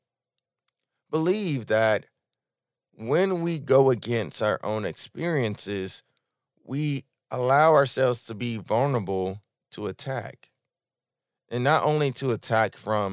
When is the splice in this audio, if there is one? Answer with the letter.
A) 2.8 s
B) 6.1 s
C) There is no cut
C